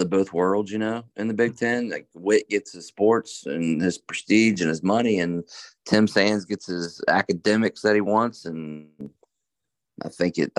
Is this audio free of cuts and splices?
yes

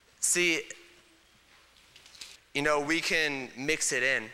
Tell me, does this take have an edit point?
yes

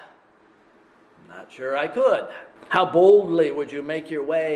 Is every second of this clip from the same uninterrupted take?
no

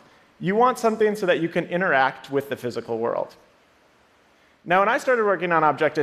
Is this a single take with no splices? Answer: yes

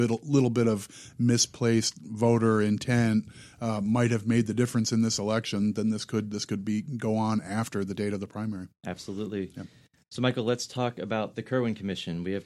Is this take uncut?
yes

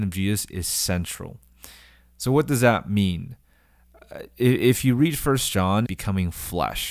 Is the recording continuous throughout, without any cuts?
no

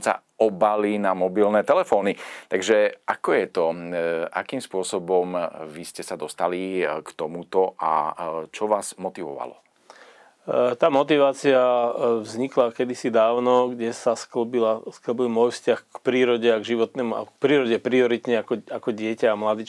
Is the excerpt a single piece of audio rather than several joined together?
yes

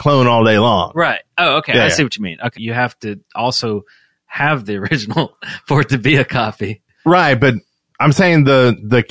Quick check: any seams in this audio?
yes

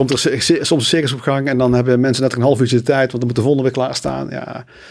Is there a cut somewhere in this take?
no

